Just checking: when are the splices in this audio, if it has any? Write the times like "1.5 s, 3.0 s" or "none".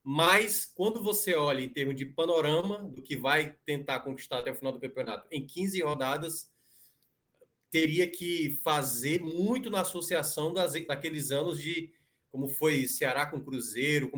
none